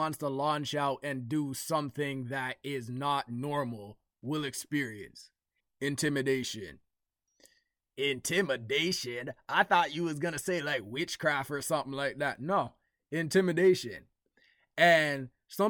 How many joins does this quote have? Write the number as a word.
one